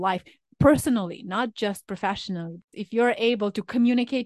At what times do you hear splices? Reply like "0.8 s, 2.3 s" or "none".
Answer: 2.7 s